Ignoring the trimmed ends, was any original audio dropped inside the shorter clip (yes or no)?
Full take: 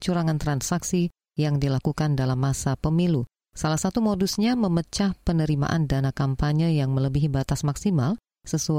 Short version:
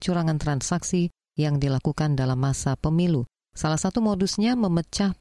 no